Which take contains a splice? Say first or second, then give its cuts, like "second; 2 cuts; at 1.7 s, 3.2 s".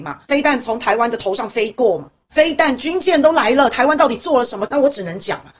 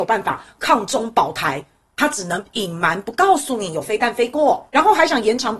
first; 1 cut; at 4.7 s